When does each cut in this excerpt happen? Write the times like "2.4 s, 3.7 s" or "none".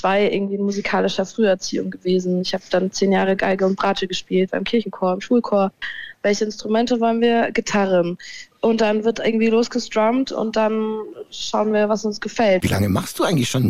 6.1 s, 12.6 s